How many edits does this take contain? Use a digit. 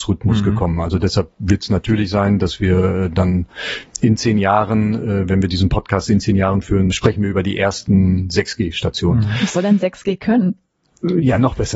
1